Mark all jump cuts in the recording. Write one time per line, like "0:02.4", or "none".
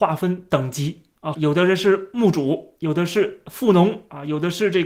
0:01.3